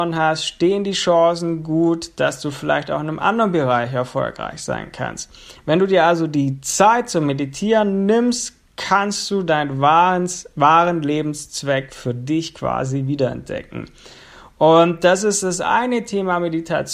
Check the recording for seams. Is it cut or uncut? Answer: uncut